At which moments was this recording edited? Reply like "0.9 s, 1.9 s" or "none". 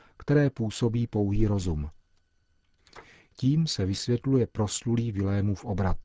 none